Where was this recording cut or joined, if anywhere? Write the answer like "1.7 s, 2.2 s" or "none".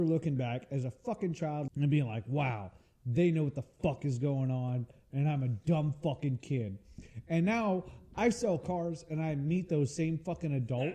1.7 s